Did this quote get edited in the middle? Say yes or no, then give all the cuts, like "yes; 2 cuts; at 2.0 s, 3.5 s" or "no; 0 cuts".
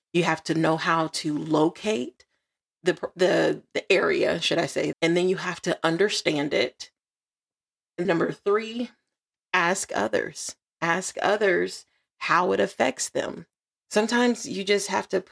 yes; 3 cuts; at 4.9 s, 8.0 s, 13.7 s